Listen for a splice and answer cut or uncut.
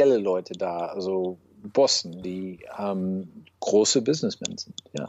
uncut